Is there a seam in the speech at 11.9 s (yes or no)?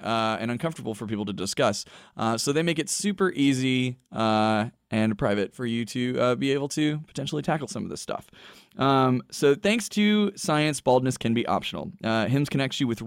no